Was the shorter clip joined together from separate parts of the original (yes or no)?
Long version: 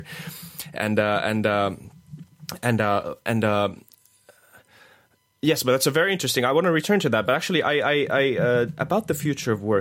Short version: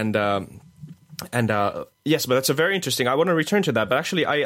yes